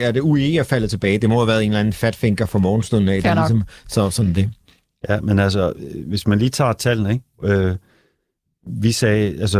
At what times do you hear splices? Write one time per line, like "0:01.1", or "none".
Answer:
none